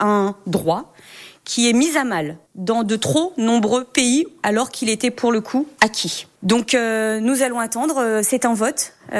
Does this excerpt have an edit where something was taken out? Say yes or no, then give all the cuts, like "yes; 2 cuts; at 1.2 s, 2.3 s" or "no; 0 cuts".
no; 0 cuts